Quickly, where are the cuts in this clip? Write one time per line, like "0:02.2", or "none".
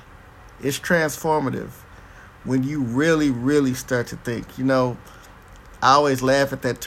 none